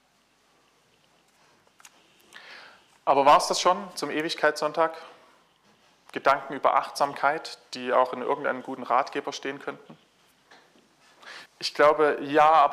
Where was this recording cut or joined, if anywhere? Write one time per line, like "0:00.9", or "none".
0:11.5